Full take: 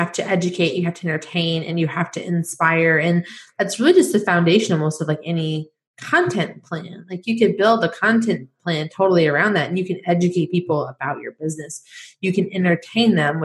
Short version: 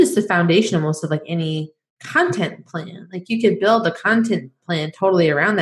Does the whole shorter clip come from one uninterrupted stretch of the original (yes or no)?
yes